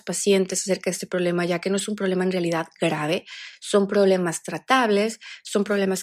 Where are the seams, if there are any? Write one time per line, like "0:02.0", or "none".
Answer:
none